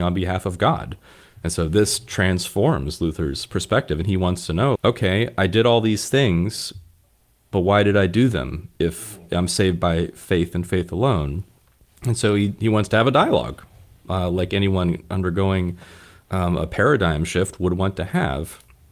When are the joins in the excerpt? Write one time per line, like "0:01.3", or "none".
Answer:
none